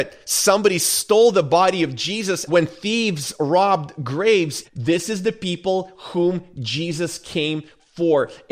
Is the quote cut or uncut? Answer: cut